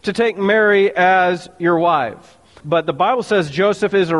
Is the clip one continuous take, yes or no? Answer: no